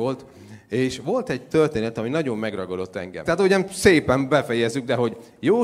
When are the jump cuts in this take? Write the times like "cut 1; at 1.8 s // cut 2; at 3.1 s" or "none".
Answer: cut 1; at 3.2 s